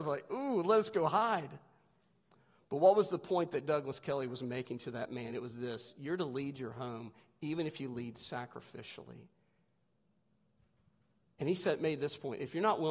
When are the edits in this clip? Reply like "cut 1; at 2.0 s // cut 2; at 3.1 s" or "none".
none